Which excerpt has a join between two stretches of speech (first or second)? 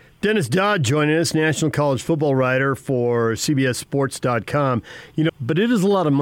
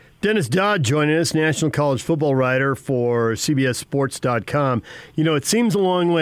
first